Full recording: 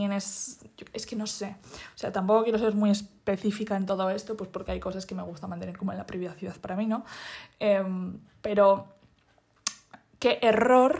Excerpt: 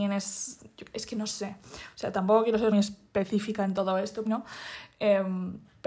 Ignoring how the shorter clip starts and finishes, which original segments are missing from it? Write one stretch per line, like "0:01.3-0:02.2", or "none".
0:02.7-0:02.8
0:04.4-0:06.9